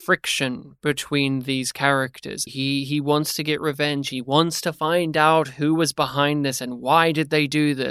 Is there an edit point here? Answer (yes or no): yes